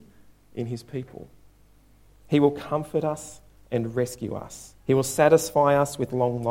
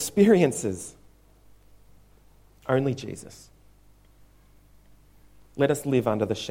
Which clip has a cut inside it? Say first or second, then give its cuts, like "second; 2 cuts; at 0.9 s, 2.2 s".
first; 2 cuts; at 2.1 s, 4.8 s